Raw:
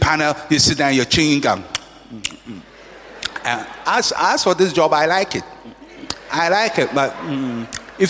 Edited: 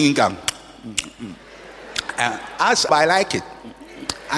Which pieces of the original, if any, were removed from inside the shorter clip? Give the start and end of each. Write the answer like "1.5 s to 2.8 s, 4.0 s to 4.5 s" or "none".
4.2 s to 4.9 s